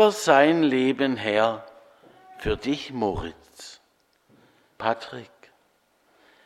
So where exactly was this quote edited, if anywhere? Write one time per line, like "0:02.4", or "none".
0:04.8